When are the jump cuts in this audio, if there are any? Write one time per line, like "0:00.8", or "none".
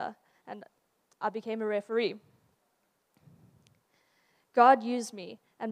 none